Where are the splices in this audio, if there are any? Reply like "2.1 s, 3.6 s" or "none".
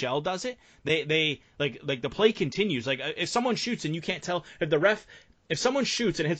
none